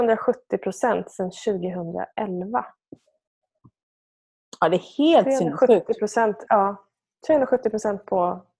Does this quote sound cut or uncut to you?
uncut